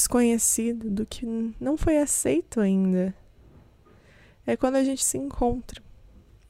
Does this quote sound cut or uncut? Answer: cut